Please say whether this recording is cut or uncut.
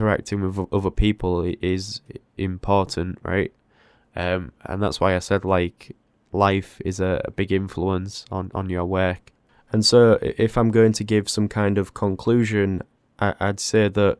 uncut